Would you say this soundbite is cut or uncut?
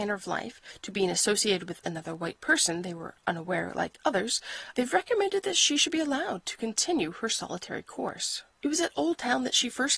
cut